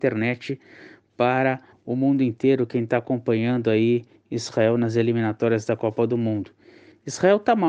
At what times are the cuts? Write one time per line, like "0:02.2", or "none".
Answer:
none